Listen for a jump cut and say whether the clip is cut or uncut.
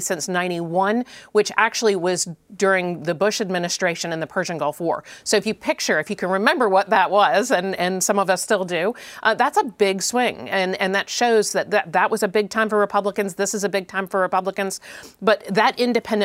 uncut